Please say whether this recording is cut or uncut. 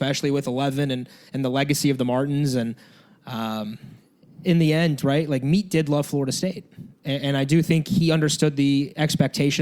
uncut